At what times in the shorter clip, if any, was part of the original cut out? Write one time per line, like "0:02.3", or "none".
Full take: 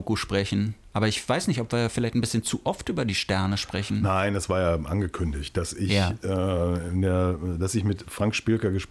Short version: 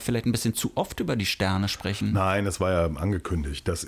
none